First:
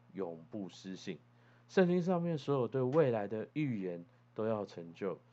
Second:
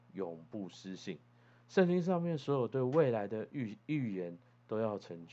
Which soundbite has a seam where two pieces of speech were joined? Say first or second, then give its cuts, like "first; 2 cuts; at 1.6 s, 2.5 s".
first; 1 cut; at 3.5 s